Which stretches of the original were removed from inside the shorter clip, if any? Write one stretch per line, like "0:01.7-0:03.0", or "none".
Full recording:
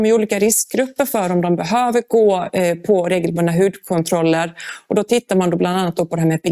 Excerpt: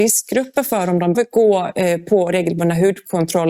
0:01.6-0:01.9